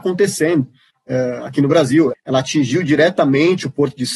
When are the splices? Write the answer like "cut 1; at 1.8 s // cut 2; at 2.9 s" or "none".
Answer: cut 1; at 0.9 s // cut 2; at 2.1 s